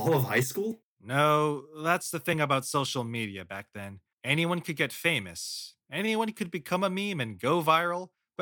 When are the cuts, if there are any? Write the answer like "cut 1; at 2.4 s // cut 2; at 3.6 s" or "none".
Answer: none